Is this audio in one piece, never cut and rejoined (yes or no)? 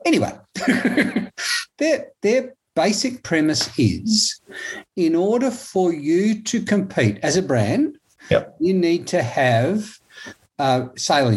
yes